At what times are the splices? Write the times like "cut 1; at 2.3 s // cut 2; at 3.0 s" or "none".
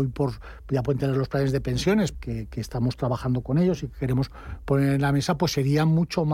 cut 1; at 2.1 s